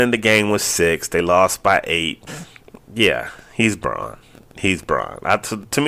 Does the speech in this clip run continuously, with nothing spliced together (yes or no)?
no